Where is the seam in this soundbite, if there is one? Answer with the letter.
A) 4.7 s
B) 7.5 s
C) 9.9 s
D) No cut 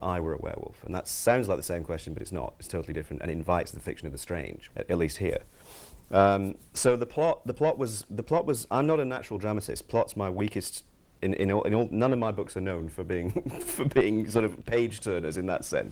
A